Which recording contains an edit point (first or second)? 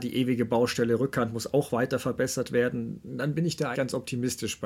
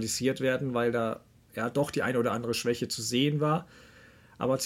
first